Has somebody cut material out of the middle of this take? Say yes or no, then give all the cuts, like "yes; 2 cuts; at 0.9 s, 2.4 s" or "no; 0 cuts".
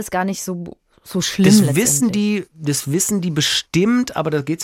no; 0 cuts